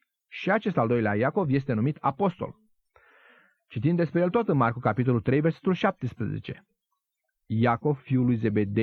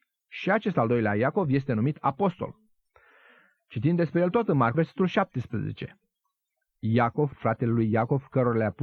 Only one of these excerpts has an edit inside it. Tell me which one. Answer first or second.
second